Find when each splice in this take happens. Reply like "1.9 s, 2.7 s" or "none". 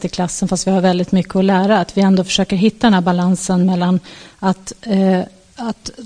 none